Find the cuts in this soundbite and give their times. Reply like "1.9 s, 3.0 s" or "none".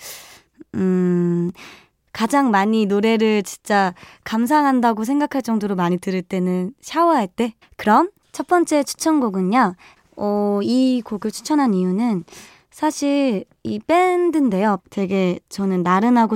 7.6 s, 10.0 s, 14.8 s